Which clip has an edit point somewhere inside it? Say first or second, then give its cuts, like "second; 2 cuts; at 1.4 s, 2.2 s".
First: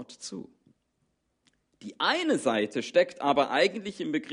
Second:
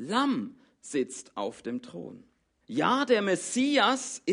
second; 1 cut; at 2.6 s